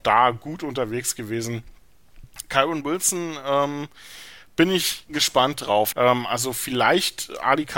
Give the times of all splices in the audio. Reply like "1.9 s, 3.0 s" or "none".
5.9 s